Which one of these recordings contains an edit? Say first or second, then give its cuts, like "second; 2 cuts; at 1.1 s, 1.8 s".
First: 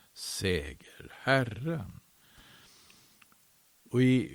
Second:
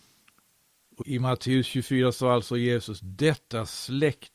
second; 1 cut; at 1.0 s